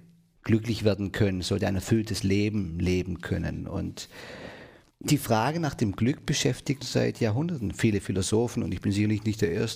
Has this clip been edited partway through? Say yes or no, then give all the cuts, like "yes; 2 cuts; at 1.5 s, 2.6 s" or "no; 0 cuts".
yes; 1 cut; at 6.8 s